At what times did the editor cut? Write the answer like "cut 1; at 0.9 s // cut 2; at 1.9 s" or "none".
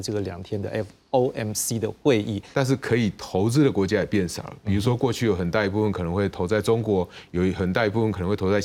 cut 1; at 2.5 s